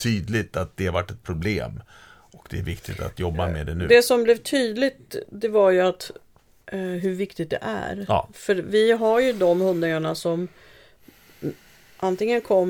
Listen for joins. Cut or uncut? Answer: uncut